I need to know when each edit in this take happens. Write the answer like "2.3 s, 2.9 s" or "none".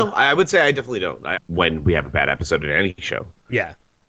1.4 s